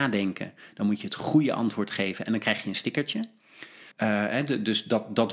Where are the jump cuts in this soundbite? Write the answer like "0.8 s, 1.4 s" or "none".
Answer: 3.9 s